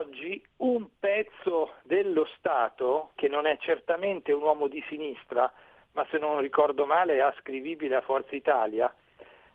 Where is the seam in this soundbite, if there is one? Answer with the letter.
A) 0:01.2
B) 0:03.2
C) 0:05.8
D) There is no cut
B